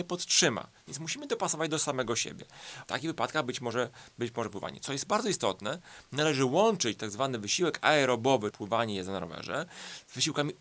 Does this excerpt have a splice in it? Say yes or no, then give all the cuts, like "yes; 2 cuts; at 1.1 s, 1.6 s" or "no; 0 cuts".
yes; 2 cuts; at 2.8 s, 8.5 s